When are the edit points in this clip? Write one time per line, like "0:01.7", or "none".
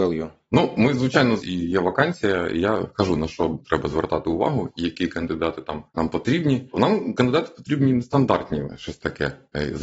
0:01.4
0:08.7